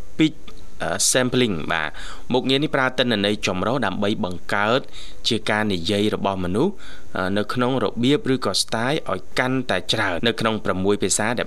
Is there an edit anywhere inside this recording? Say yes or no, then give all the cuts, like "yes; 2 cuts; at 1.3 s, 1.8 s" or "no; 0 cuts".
yes; 1 cut; at 10.2 s